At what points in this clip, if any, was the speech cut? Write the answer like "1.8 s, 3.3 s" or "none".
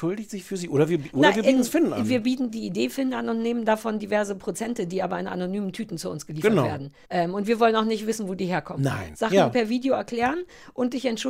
7.0 s, 9.1 s